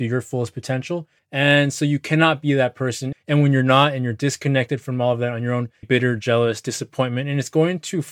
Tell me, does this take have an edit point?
yes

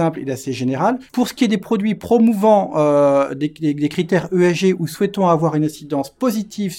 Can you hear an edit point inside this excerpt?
yes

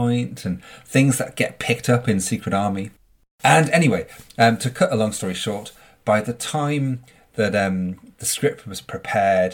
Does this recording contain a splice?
no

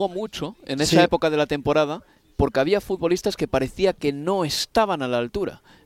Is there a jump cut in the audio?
no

